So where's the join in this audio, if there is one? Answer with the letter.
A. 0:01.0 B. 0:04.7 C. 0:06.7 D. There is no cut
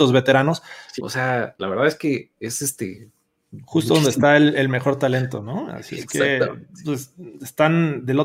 A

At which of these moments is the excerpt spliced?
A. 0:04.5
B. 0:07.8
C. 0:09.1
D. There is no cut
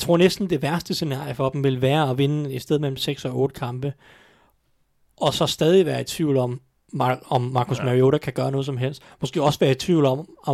D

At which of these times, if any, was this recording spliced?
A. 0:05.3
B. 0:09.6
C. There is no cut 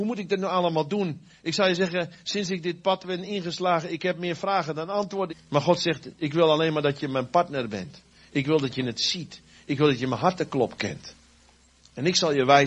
A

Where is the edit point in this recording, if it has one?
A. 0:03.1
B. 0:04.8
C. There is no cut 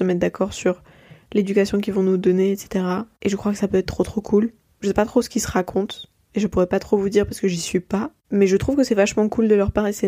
B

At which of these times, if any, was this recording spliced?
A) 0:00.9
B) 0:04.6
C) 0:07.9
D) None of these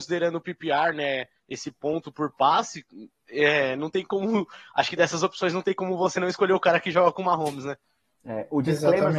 D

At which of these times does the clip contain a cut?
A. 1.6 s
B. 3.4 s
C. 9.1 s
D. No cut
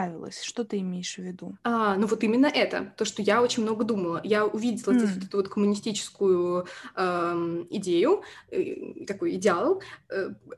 A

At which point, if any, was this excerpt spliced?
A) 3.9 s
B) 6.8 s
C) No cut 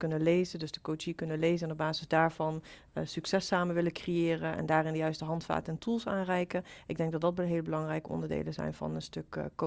C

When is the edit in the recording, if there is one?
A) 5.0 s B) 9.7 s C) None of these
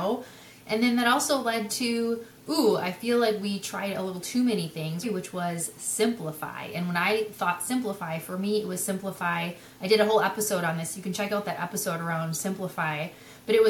A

